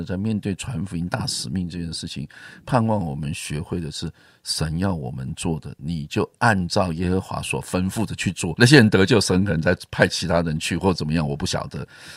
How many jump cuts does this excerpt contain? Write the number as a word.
one